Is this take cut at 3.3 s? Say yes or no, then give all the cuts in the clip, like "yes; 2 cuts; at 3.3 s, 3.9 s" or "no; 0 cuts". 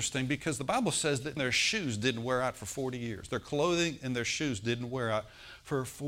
no; 1 cut; at 1.4 s